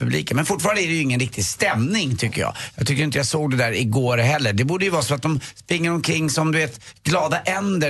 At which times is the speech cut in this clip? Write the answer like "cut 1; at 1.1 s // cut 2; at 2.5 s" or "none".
none